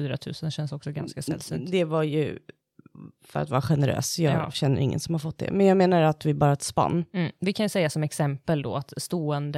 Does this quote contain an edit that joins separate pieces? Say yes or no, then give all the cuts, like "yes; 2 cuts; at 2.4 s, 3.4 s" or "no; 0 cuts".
no; 0 cuts